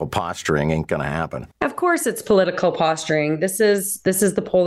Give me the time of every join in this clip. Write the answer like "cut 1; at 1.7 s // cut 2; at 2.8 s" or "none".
cut 1; at 1.5 s